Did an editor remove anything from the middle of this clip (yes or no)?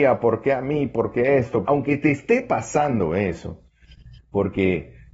yes